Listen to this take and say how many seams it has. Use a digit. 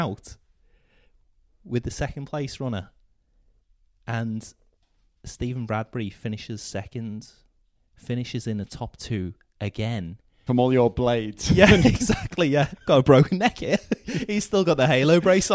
1